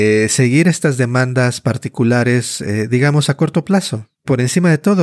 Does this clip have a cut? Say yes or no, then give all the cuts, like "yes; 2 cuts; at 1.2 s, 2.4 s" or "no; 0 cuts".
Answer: yes; 1 cut; at 4.1 s